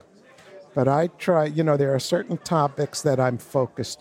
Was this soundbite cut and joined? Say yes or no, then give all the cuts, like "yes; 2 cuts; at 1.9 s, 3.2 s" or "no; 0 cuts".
no; 0 cuts